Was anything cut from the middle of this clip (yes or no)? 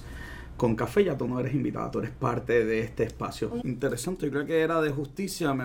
yes